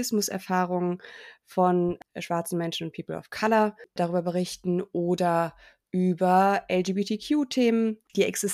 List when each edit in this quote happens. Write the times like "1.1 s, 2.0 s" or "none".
none